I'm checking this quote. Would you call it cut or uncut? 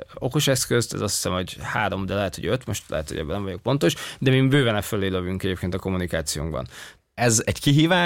cut